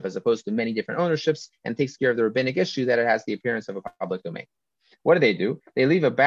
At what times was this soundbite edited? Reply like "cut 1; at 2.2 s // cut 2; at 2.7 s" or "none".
none